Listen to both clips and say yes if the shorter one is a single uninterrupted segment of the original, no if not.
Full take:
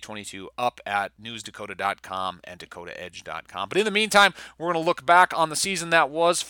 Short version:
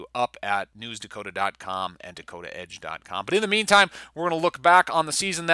yes